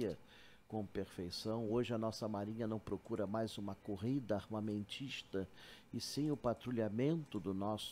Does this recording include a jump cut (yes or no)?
no